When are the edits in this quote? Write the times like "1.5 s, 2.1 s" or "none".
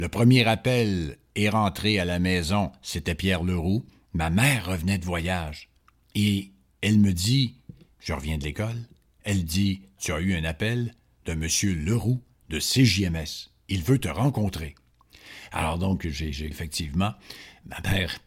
16.5 s